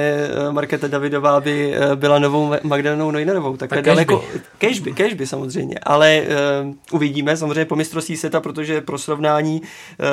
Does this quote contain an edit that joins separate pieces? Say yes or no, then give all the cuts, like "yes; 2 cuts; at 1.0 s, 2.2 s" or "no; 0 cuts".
no; 0 cuts